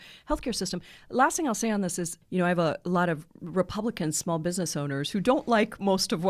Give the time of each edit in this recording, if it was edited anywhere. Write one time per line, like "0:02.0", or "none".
0:02.2